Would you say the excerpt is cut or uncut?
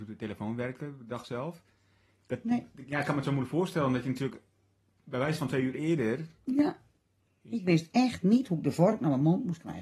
cut